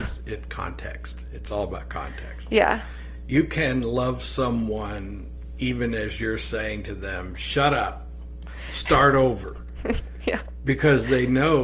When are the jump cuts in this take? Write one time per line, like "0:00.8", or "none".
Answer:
none